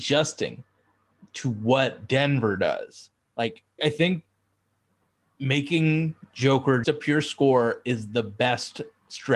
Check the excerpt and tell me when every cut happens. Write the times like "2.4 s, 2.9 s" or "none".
3.8 s, 6.8 s